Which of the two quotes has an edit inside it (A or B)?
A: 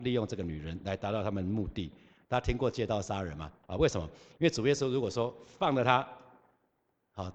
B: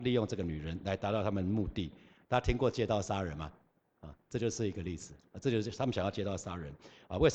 A